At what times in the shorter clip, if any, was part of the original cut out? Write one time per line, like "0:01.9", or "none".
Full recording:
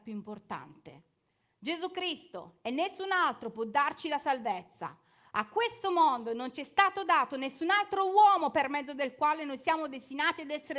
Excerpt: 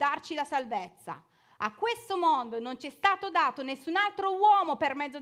none